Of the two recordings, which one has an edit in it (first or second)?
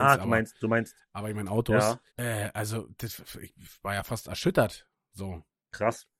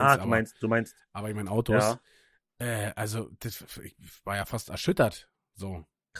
first